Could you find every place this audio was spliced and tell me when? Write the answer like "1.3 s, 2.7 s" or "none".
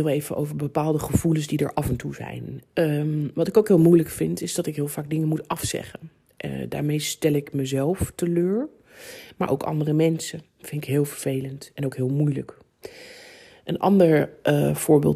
none